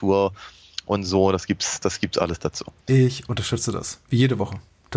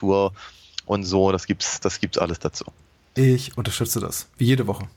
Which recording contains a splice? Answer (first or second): first